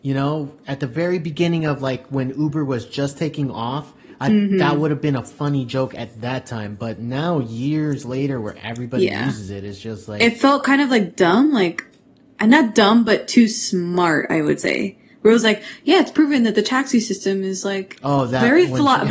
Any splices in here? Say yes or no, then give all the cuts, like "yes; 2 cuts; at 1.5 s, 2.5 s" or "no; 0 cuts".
no; 0 cuts